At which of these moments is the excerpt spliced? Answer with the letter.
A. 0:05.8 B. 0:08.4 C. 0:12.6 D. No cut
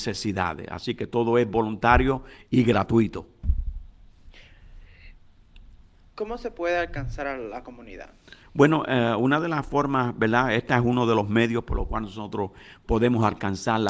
D